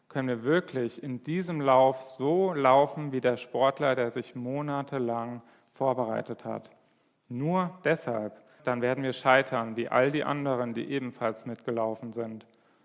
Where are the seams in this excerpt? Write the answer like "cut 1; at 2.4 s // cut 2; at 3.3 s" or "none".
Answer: cut 1; at 8.6 s